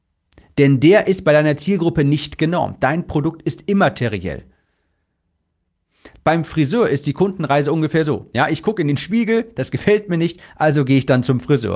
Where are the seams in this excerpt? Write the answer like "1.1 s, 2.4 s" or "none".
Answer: 6.1 s